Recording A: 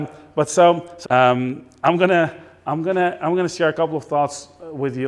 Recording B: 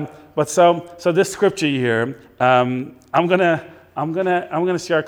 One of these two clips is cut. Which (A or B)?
A